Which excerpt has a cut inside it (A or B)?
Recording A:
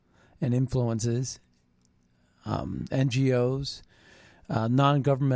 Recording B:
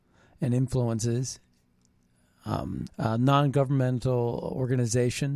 B